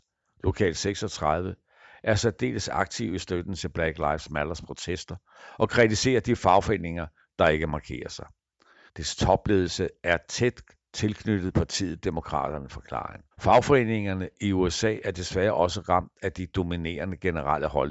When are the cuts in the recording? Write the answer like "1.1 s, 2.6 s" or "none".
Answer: 8.9 s, 13.3 s